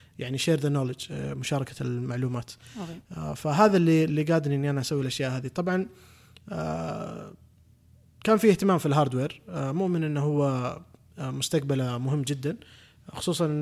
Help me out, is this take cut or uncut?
uncut